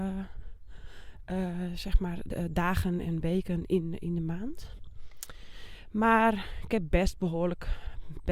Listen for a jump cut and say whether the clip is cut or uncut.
uncut